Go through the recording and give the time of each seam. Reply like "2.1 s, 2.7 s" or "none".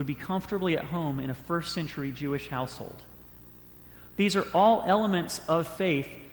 none